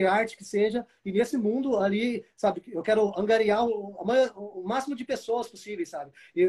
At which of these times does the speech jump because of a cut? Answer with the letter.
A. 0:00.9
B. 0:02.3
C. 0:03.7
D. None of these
D